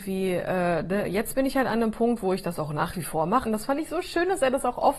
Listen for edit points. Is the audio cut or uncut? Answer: cut